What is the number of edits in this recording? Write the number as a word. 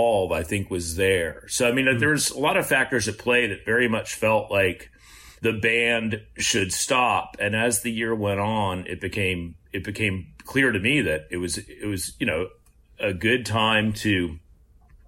zero